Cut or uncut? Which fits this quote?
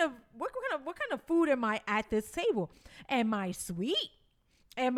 uncut